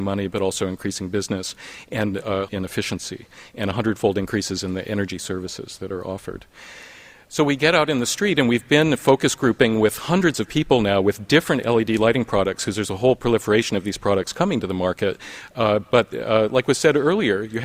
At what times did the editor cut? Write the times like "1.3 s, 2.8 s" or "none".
2.5 s